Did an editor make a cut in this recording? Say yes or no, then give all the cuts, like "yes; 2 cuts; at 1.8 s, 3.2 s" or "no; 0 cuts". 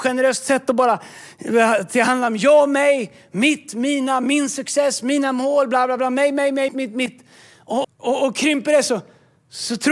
yes; 2 cuts; at 6.7 s, 7.8 s